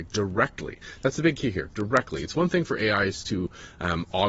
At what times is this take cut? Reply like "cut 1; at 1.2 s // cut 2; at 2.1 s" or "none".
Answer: none